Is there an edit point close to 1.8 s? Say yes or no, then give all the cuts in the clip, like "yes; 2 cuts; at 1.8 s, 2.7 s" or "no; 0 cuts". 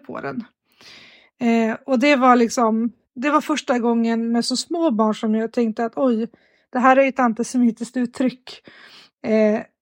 no; 1 cut; at 3.0 s